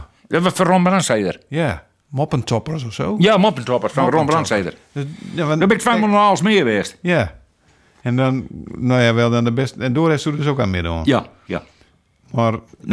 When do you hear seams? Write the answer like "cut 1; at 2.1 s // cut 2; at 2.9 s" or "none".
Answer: none